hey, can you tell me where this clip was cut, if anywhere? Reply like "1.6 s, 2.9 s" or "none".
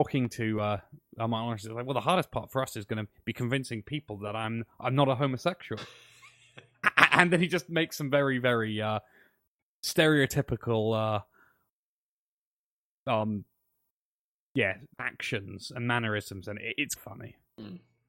14.9 s, 17.0 s

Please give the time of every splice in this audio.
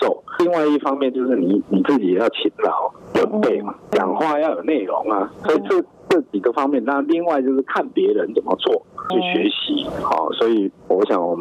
none

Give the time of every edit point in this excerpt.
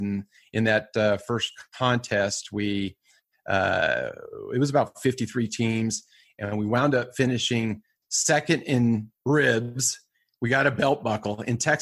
none

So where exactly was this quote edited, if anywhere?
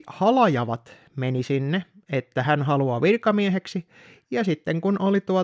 2.0 s

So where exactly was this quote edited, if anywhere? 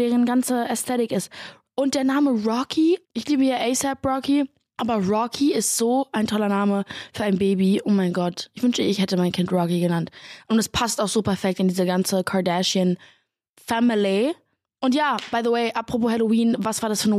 3.0 s

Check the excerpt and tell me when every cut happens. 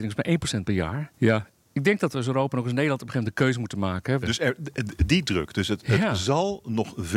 1.2 s, 4.2 s

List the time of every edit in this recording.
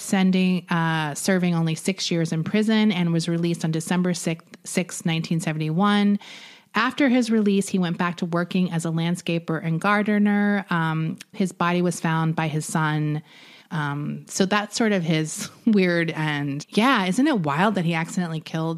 11.3 s, 13.6 s, 16.6 s

